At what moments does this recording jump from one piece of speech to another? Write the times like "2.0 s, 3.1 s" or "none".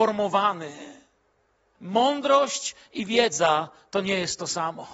1.7 s